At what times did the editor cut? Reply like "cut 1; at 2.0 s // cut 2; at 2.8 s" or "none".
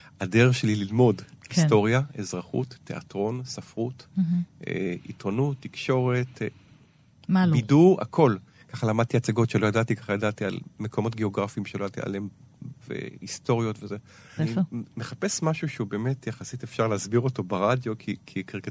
cut 1; at 12.8 s // cut 2; at 14.4 s